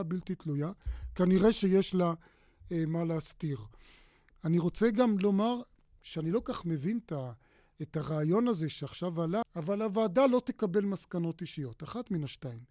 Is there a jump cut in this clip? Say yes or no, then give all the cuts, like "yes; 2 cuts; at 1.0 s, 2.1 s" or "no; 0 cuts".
yes; 1 cut; at 9.4 s